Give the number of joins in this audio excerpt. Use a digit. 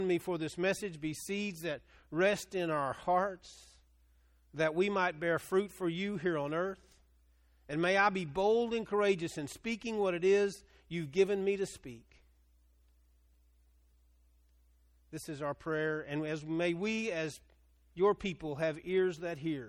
0